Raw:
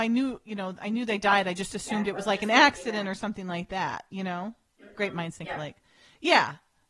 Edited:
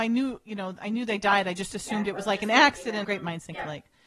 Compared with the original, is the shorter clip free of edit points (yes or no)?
no